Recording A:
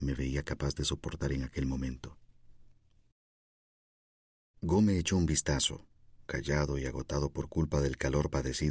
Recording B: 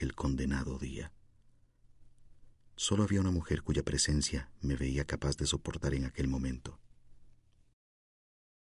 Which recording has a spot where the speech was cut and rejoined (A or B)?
A